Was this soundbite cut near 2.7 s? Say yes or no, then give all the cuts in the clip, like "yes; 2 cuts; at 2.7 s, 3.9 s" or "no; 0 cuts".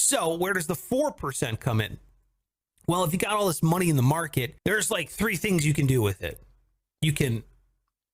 no; 1 cut; at 4.6 s